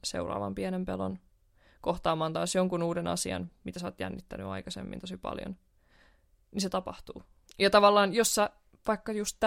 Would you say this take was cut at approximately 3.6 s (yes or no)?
no